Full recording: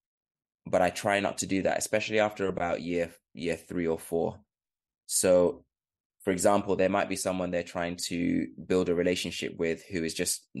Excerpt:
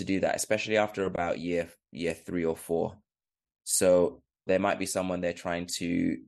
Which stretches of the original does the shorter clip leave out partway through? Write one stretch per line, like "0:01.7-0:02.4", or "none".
0:05.9-0:06.8